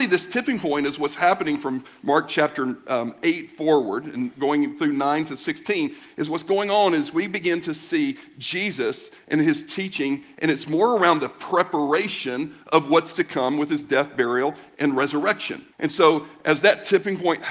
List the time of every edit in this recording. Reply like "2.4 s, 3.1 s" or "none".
15.7 s

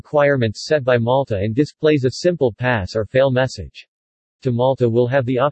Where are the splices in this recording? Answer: 4.4 s

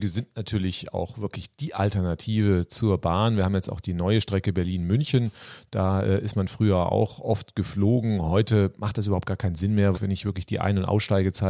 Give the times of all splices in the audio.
9.9 s

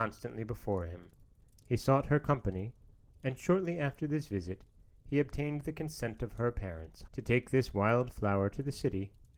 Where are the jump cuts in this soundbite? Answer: 3.1 s, 7.1 s

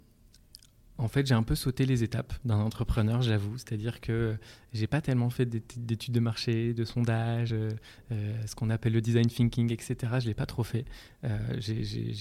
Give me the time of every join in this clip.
none

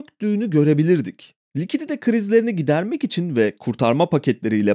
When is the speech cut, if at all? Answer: 1.4 s

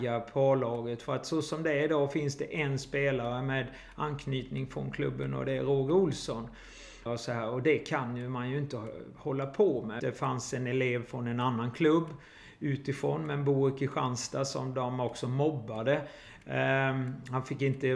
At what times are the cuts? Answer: 7.1 s, 10.0 s

